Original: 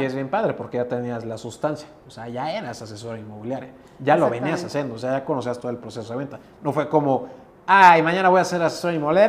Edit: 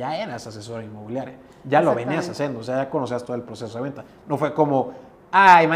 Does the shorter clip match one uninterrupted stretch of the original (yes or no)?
yes